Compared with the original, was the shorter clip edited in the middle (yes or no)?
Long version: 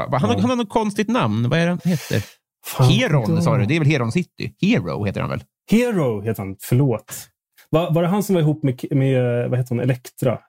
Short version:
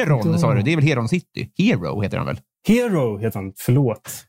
no